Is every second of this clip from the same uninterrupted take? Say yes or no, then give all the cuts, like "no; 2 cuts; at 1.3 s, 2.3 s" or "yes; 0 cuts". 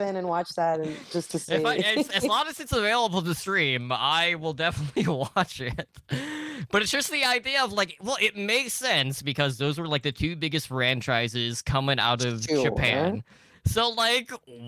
yes; 0 cuts